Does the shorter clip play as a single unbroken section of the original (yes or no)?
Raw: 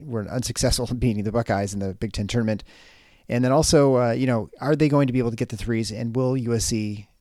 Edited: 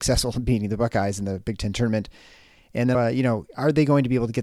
no